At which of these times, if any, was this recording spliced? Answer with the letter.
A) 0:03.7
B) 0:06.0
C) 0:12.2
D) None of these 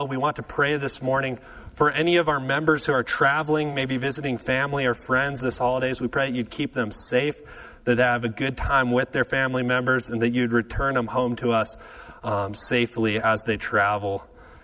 D